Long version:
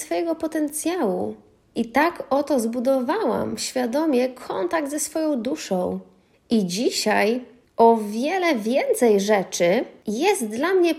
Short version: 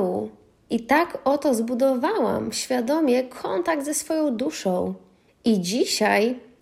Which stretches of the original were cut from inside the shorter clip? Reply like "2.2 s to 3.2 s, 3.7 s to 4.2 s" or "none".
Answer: none